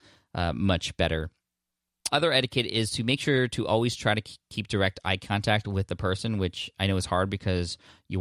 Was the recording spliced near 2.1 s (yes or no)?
yes